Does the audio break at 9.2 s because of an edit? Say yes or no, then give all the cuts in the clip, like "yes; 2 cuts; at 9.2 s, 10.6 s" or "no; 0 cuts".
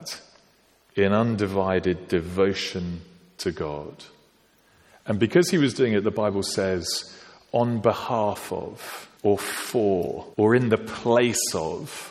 yes; 2 cuts; at 9.2 s, 10.3 s